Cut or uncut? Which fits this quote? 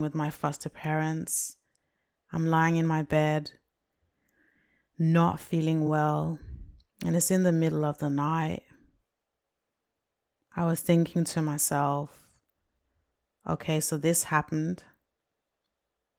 uncut